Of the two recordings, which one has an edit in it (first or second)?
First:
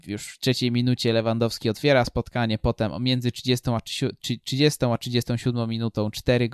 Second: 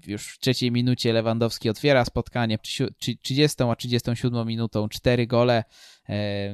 second